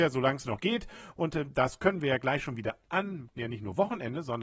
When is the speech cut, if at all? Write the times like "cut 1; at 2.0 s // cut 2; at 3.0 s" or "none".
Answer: cut 1; at 3.3 s

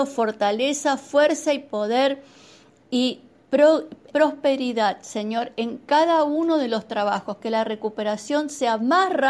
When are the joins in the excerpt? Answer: cut 1; at 4.1 s

